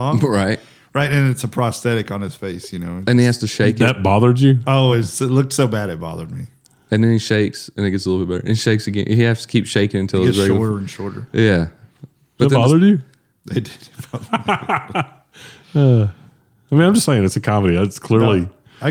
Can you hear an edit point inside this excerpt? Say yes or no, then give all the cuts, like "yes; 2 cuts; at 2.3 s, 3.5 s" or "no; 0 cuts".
no; 0 cuts